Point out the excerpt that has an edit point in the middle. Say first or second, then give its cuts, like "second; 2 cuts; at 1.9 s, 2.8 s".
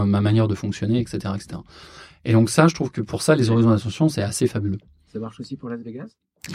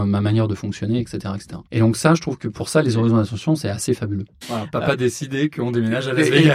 second; 2 cuts; at 1.7 s, 4.4 s